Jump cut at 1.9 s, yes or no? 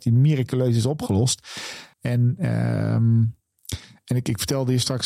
yes